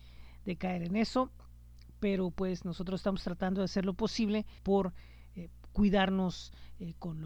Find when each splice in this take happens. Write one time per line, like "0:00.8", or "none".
0:04.6